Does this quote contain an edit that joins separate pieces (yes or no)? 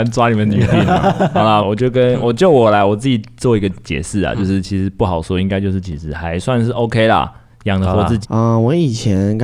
yes